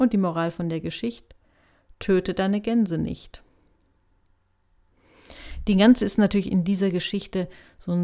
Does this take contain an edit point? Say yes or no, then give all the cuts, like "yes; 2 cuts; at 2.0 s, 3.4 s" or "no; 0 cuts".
no; 0 cuts